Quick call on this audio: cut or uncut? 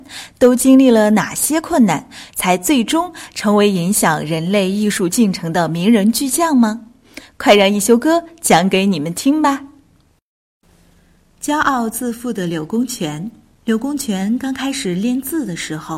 cut